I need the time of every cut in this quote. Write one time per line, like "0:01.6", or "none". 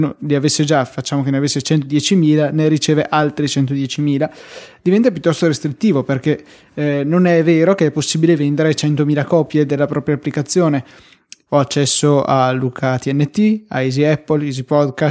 0:11.5